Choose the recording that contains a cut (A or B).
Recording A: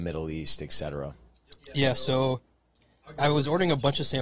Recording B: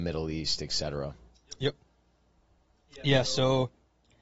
A